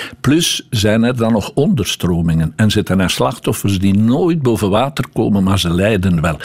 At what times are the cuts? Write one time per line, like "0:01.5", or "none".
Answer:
none